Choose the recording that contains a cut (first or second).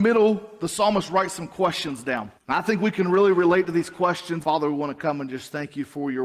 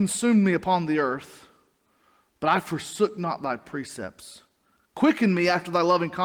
first